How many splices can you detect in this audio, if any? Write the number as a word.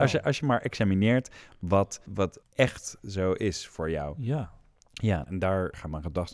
one